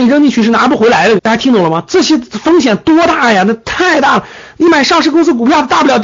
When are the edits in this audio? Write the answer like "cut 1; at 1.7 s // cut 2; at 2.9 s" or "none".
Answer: cut 1; at 1.2 s

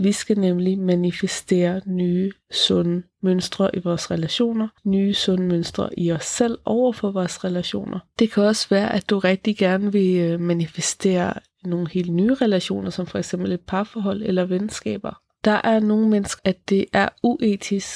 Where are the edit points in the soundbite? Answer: cut 1; at 4.8 s // cut 2; at 16.4 s

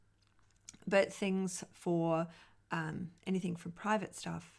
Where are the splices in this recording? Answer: none

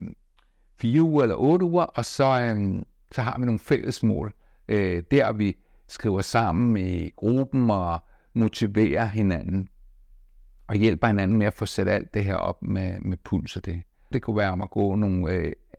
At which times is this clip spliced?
cut 1; at 14.1 s

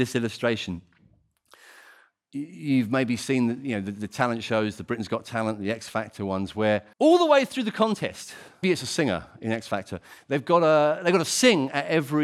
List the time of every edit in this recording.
cut 1; at 6.9 s // cut 2; at 8.6 s

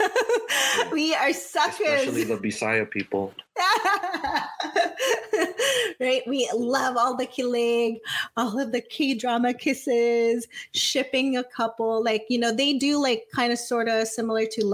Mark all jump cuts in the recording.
none

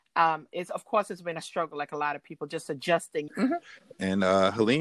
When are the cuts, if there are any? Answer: cut 1; at 3.3 s

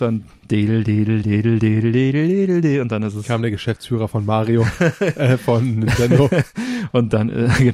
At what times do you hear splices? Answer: cut 1; at 1.2 s

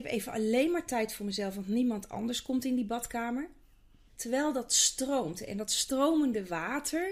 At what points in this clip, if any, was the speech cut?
cut 1; at 4.1 s

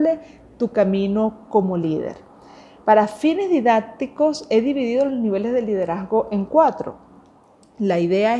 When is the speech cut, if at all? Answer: none

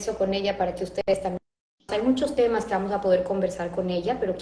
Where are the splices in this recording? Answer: cut 1; at 1.9 s

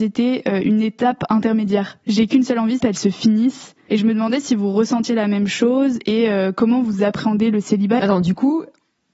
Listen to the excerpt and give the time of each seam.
cut 1; at 2.8 s // cut 2; at 8.0 s

